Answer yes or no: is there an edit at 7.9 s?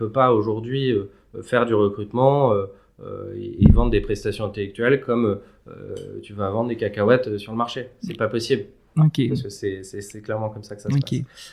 no